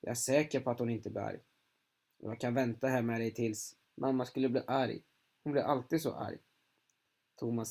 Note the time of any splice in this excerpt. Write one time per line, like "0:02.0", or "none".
0:03.8

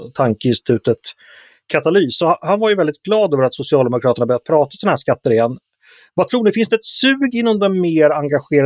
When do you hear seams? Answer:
none

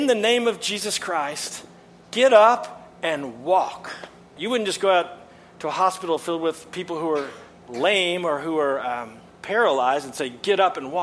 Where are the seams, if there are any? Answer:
0:04.4

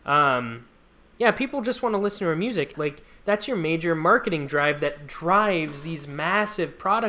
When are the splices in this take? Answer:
0:02.7

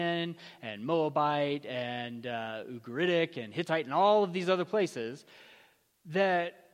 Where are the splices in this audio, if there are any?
none

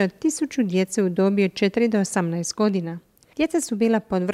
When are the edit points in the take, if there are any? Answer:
none

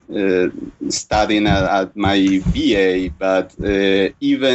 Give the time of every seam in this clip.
none

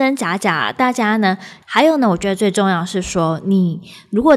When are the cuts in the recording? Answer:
0:01.6

